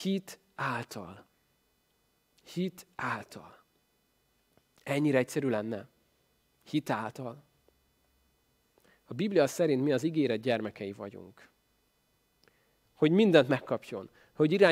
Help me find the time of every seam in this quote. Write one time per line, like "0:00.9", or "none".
0:12.8